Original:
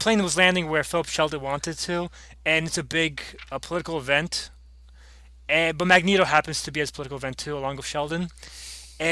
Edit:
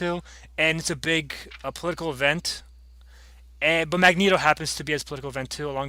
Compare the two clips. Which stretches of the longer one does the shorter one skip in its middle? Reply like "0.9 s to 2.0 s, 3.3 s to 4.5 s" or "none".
none